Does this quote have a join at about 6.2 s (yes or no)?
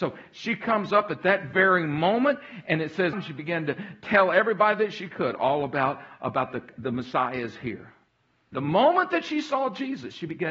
no